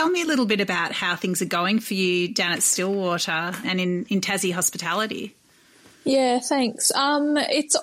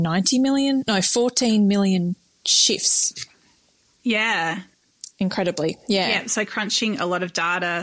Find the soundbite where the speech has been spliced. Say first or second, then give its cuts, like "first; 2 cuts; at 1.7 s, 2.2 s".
first; 1 cut; at 3.6 s